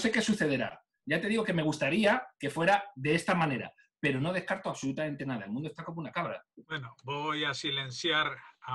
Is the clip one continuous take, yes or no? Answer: no